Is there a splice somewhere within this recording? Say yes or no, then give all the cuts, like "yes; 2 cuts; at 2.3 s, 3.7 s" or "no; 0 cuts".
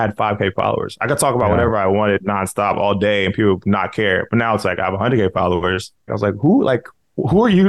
yes; 2 cuts; at 3.6 s, 6.1 s